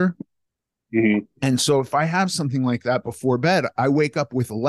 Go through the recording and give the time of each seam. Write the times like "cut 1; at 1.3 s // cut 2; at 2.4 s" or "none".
none